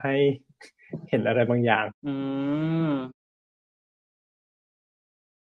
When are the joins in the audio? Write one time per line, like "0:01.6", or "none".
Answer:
0:02.0